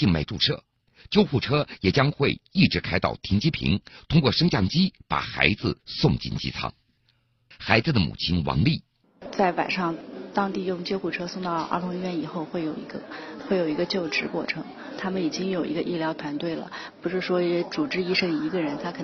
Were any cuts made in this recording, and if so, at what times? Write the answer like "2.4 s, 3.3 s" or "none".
7.5 s